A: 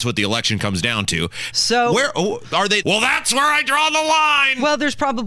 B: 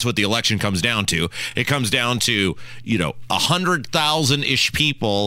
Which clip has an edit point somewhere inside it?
A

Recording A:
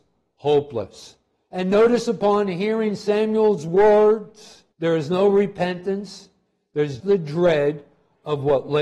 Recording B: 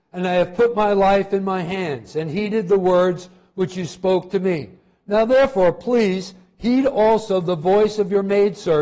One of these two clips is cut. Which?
A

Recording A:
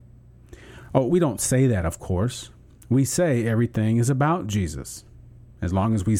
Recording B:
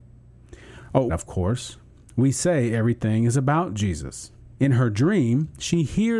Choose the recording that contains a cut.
B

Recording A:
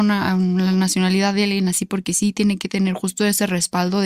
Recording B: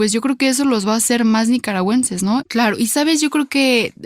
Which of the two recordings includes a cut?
B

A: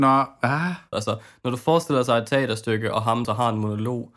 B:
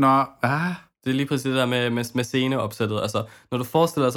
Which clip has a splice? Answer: A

